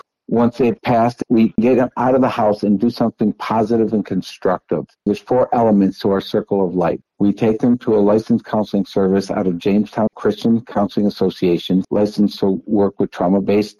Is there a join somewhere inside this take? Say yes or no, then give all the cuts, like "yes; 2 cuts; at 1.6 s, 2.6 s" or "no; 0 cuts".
yes; 3 cuts; at 7.0 s, 10.1 s, 11.8 s